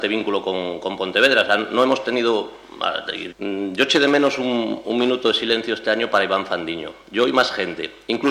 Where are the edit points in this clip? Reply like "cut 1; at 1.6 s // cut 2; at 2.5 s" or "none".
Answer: cut 1; at 3.3 s